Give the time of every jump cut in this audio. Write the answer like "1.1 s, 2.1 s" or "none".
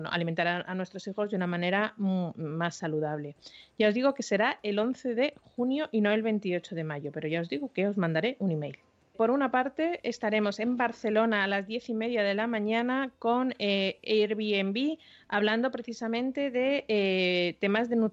9.1 s